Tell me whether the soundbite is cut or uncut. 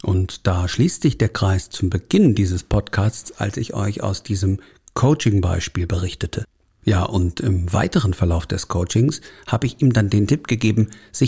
cut